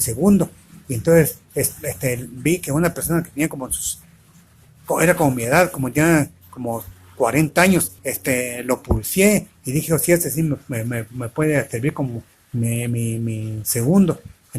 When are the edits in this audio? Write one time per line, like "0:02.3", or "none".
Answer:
0:08.0